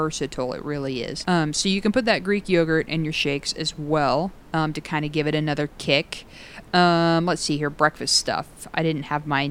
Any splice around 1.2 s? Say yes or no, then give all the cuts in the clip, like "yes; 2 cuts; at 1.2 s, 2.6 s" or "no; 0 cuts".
yes; 1 cut; at 1.2 s